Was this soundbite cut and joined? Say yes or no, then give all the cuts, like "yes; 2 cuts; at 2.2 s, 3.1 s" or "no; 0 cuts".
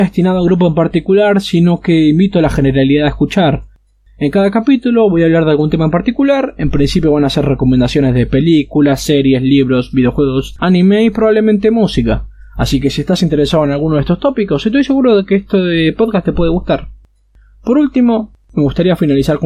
no; 0 cuts